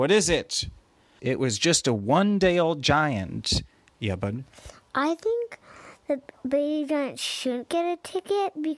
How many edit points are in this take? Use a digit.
2